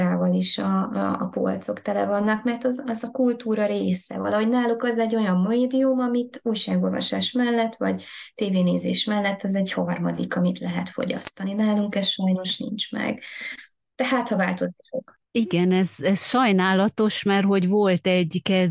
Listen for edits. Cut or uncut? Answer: uncut